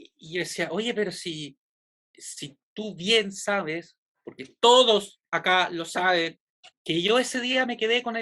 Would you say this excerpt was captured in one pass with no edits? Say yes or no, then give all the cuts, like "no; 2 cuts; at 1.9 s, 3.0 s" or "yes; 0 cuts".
no; 1 cut; at 6.7 s